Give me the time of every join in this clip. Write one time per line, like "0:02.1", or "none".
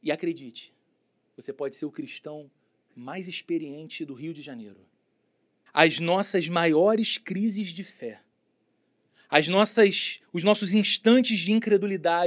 0:05.7